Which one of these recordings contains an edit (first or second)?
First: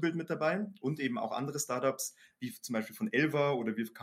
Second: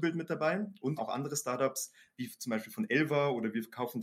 second